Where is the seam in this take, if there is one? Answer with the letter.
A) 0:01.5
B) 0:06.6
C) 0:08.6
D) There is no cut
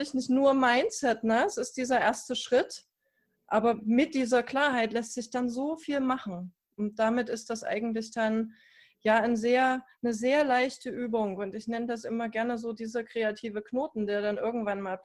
D